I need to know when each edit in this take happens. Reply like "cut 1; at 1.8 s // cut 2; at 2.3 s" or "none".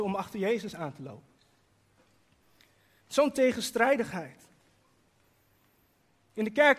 cut 1; at 3.0 s